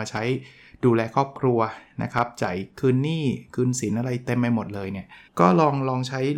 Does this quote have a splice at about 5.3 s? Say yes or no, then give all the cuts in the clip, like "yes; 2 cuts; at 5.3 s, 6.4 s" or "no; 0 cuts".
yes; 1 cut; at 5.3 s